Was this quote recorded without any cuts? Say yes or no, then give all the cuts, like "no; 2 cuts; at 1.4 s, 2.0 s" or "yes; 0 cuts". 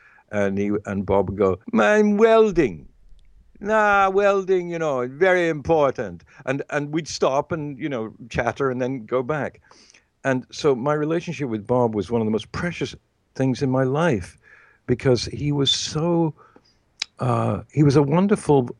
no; 1 cut; at 1.6 s